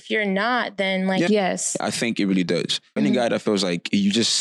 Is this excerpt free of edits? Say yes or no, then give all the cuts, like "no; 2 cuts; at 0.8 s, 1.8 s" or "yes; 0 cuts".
no; 2 cuts; at 1.3 s, 3.0 s